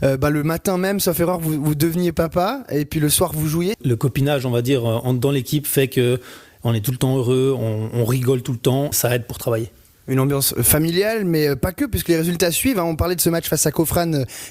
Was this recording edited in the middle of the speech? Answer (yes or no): yes